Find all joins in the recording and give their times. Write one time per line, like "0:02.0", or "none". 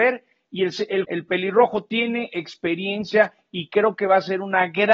0:01.0